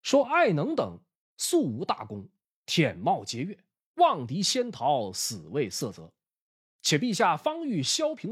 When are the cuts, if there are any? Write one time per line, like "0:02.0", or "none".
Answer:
none